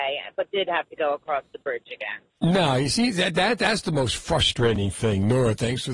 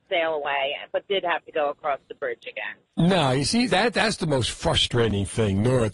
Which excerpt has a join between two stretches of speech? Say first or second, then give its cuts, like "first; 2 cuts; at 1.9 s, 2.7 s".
second; 1 cut; at 3.7 s